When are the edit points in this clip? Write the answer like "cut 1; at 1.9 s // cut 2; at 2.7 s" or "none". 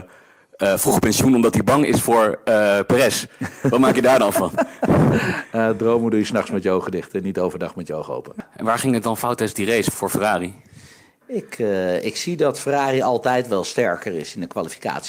cut 1; at 9.9 s